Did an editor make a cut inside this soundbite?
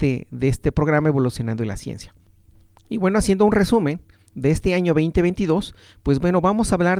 no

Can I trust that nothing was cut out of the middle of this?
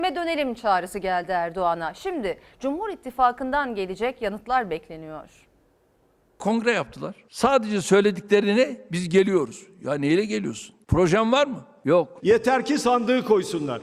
no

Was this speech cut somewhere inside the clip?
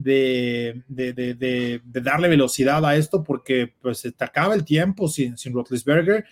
yes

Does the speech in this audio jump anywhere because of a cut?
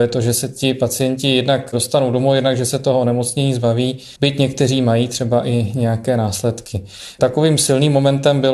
yes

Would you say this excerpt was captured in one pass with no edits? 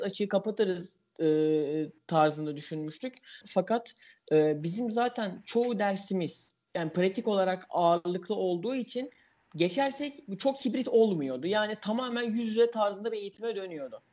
no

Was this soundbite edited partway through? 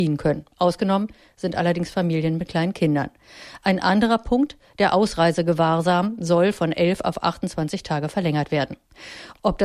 no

